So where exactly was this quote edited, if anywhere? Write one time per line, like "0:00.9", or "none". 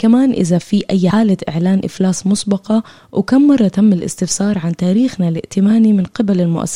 0:01.1